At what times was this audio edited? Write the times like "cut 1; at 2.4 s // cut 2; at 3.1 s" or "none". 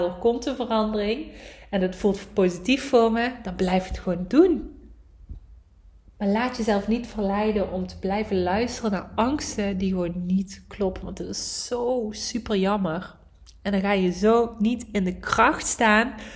none